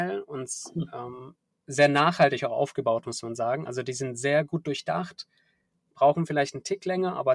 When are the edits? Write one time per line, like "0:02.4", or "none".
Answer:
none